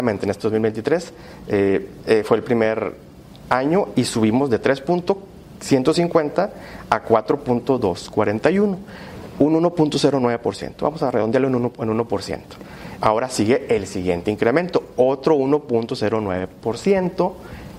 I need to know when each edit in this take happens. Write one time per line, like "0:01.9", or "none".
0:13.0